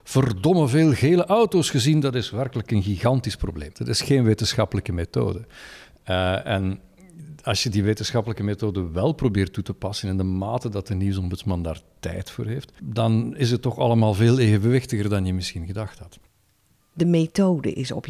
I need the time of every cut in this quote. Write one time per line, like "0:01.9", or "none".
0:03.7
0:12.8
0:16.8